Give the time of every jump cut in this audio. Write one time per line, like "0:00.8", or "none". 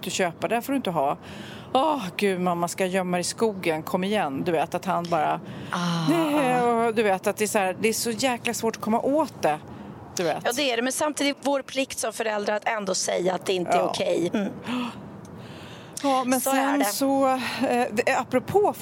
0:11.3
0:14.3

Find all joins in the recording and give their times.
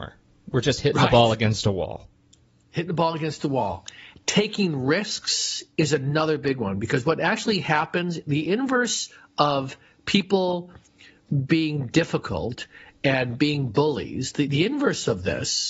none

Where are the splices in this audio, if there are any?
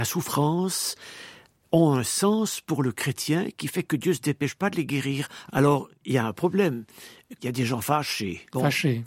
0:05.5
0:07.4

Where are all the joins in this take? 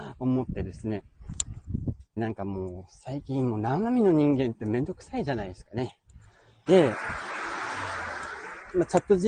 0:02.2
0:06.7

